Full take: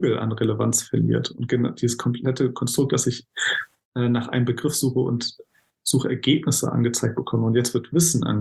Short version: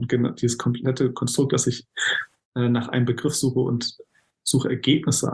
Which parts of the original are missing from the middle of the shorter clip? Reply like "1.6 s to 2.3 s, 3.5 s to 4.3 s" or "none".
none